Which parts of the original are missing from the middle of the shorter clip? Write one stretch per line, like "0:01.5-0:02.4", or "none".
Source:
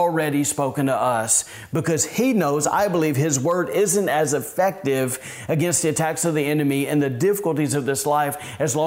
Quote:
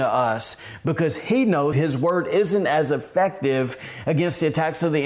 0:02.6-0:03.1